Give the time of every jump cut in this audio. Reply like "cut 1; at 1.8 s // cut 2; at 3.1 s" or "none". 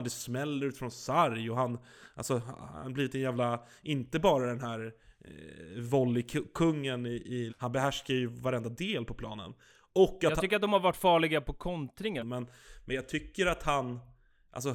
cut 1; at 7.5 s // cut 2; at 12.2 s

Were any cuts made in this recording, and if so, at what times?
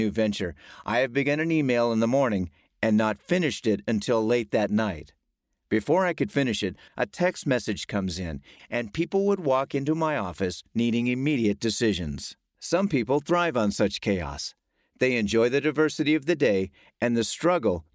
cut 1; at 6.9 s // cut 2; at 8.6 s

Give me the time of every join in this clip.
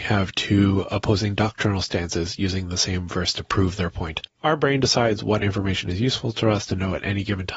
cut 1; at 4.4 s

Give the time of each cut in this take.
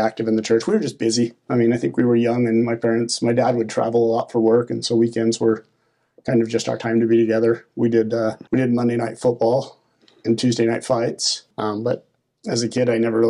cut 1; at 8.5 s // cut 2; at 11.5 s

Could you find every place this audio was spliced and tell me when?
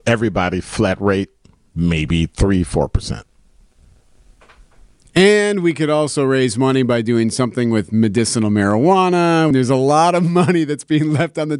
cut 1; at 9.5 s

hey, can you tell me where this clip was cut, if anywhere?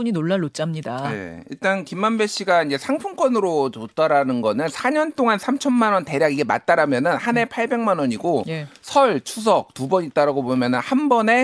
none

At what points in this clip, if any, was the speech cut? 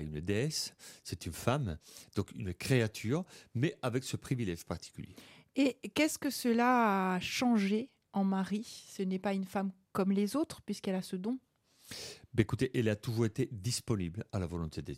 none

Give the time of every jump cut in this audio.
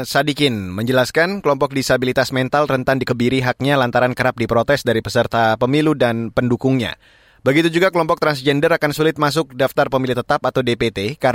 none

